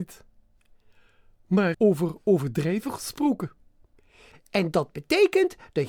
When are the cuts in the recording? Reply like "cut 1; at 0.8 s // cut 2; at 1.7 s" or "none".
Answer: cut 1; at 1.7 s // cut 2; at 4.3 s